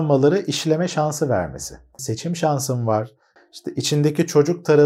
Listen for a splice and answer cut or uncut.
cut